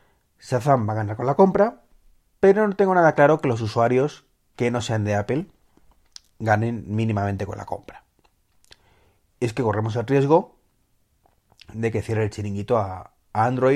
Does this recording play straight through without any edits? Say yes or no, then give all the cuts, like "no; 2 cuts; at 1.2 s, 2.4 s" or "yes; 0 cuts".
yes; 0 cuts